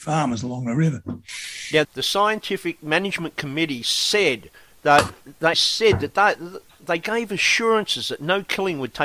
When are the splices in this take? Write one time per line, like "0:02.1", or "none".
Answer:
0:01.8
0:05.5